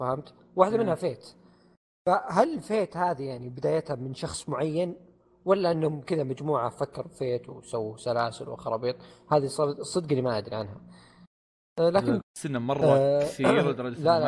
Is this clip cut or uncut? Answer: cut